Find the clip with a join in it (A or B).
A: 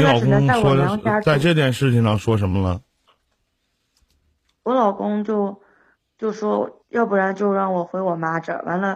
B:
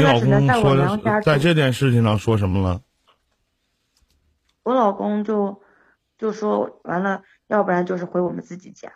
B